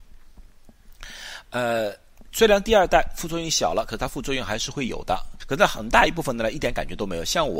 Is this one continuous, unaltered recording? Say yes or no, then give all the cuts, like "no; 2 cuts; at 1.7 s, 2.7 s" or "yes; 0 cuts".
no; 2 cuts; at 2.3 s, 5.4 s